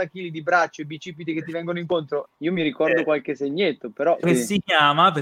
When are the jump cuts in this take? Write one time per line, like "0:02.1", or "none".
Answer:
0:02.3
0:04.2